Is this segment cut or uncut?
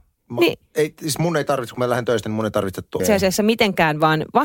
cut